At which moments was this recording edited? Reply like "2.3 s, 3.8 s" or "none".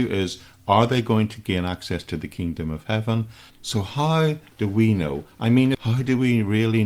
3.5 s, 5.7 s